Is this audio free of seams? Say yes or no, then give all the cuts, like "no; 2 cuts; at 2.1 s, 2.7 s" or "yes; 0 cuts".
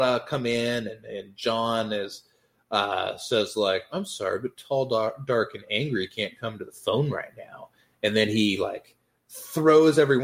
yes; 0 cuts